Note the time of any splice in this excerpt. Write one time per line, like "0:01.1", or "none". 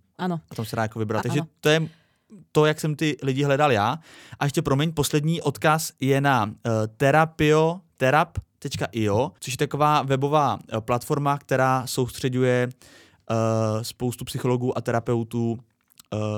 0:01.2
0:09.4